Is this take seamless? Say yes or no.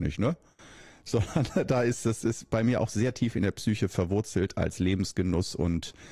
yes